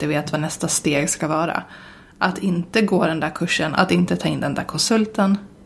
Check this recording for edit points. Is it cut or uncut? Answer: cut